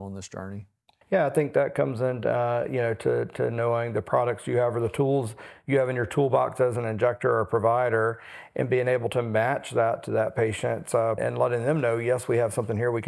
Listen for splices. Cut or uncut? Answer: cut